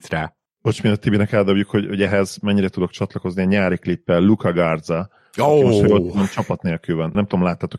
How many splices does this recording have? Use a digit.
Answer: 0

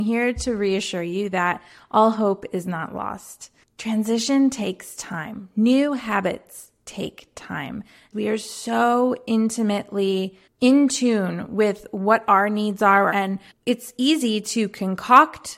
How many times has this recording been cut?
1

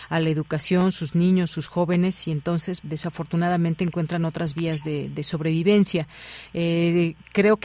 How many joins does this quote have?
2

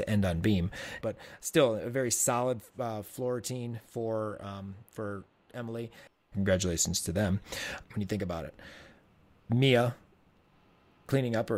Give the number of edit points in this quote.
3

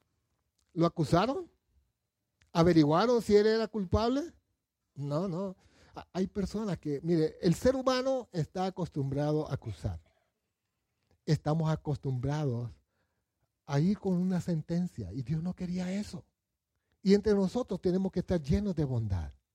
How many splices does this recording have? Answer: 0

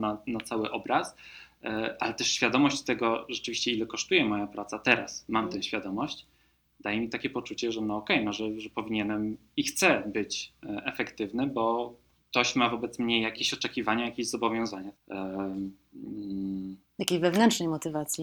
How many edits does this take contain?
1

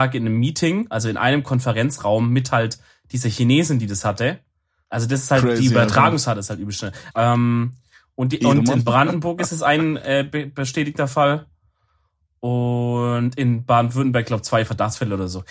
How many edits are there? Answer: 2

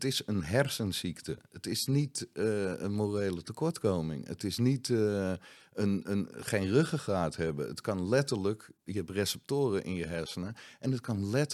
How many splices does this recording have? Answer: 0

